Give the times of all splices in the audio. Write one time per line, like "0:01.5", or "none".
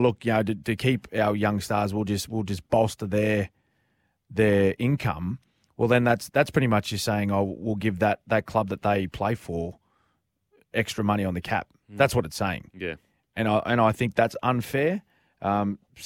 none